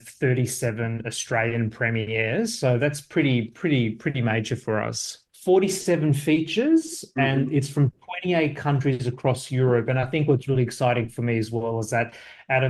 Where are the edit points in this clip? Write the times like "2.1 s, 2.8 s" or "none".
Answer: 5.3 s